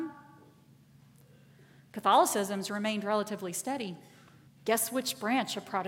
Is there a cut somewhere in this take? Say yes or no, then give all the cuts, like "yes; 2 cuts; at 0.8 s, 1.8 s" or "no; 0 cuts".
yes; 1 cut; at 4.5 s